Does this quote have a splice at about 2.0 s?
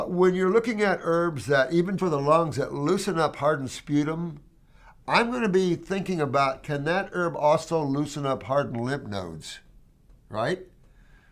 yes; 1 cut; at 2.0 s

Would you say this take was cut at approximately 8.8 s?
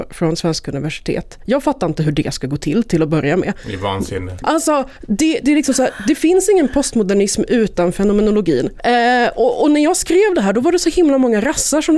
yes; 2 cuts; at 4.4 s, 8.8 s

